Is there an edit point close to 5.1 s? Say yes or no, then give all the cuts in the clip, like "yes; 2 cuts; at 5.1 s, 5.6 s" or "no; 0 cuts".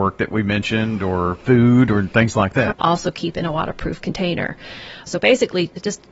yes; 2 cuts; at 2.7 s, 5.1 s